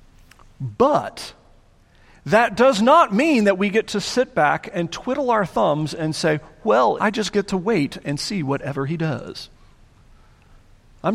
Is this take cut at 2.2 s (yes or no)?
no